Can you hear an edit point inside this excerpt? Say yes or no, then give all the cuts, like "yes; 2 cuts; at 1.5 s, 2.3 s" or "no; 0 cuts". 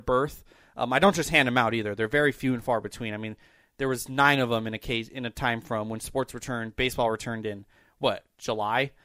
no; 0 cuts